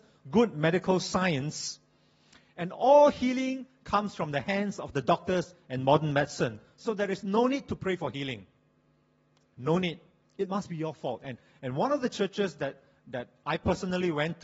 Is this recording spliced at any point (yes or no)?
yes